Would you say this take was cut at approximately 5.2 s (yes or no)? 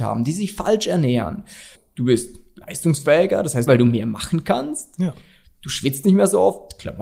no